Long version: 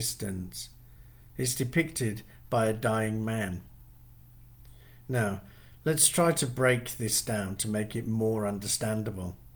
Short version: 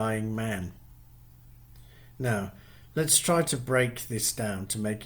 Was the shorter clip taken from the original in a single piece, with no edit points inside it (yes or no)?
yes